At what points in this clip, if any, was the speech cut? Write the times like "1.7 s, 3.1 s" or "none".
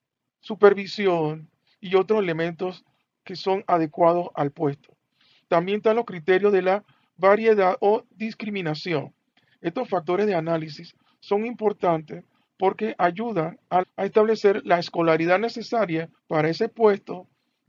13.8 s, 16.2 s